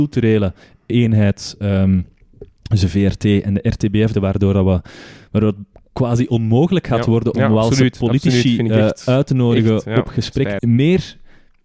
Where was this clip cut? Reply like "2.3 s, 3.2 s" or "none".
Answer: 4.1 s, 10.6 s